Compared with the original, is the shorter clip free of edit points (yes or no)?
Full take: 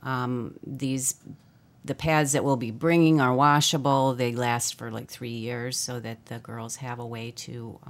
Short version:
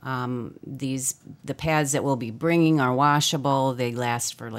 no